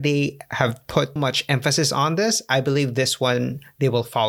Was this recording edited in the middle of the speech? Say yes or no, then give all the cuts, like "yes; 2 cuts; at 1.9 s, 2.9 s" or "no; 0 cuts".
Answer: yes; 1 cut; at 1.2 s